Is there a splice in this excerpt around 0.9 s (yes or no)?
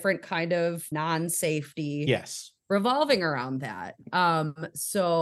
yes